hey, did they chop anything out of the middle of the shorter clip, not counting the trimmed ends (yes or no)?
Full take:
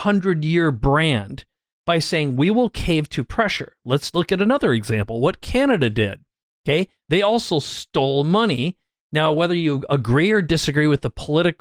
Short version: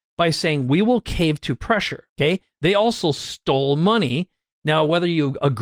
yes